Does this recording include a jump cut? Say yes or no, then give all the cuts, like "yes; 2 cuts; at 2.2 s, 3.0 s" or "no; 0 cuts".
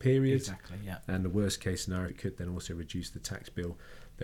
yes; 1 cut; at 2.1 s